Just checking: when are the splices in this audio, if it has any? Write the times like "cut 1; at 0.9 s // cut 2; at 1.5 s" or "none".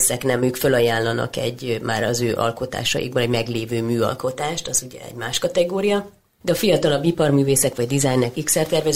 none